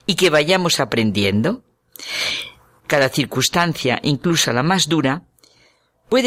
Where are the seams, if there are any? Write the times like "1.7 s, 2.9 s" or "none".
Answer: 2.8 s

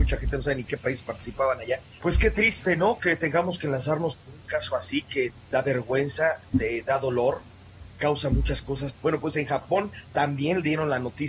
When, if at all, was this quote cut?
2.0 s, 8.9 s

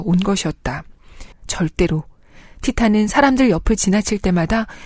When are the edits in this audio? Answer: 1.3 s

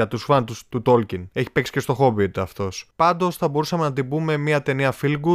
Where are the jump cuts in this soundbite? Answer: none

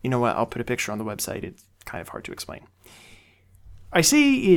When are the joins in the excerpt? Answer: none

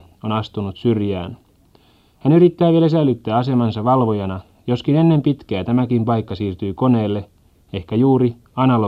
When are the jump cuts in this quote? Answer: none

